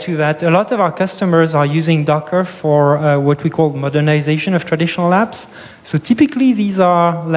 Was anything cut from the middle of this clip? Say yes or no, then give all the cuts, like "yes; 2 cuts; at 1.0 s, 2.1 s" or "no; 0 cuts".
no; 0 cuts